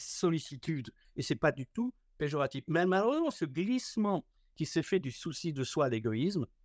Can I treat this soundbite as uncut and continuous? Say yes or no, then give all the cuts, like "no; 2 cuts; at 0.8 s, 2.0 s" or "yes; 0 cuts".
no; 1 cut; at 1.0 s